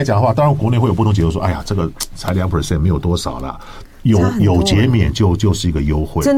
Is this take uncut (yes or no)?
no